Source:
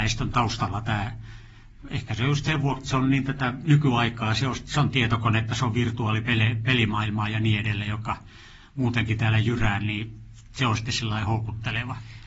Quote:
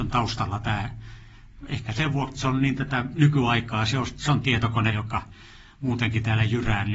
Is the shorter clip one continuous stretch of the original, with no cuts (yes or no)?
no